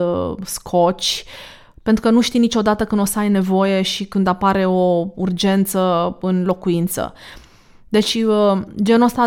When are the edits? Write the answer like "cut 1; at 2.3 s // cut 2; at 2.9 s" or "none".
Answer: none